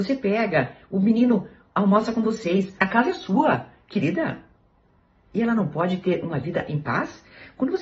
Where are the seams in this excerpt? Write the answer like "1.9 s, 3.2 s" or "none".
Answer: 2.8 s

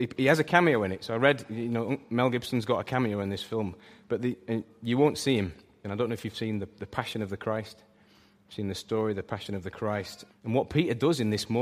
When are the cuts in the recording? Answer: 5.8 s, 10.3 s

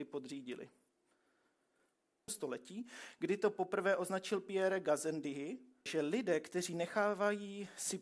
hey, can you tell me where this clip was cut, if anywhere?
2.3 s, 5.9 s

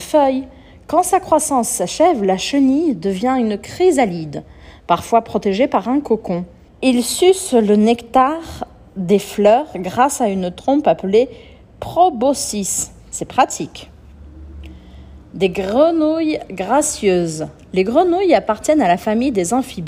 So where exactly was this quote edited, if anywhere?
6.7 s

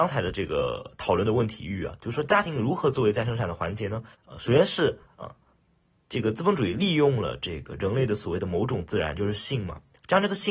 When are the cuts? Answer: 4.1 s

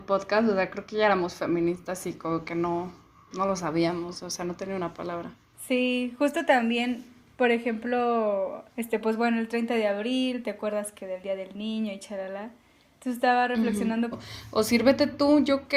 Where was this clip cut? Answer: 8.7 s, 14.1 s

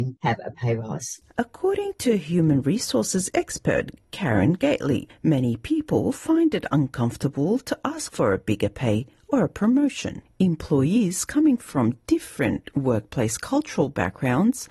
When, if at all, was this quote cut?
none

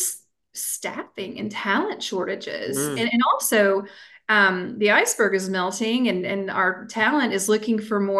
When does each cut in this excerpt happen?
none

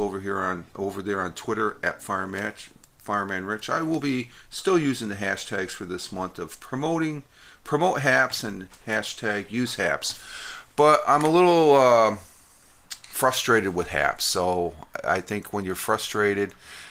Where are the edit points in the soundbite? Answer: none

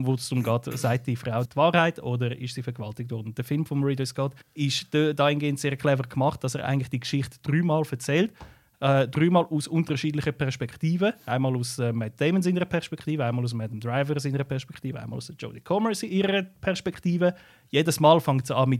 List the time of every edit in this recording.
1.4 s, 4.4 s

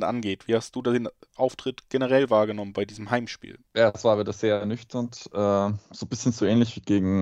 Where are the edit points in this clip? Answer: 3.7 s

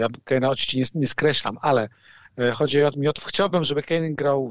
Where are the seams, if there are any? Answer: 3.2 s

